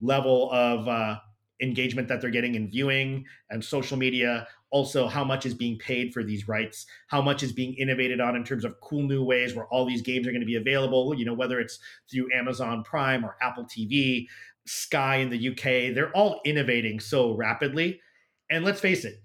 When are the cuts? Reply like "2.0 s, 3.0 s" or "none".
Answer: 14.5 s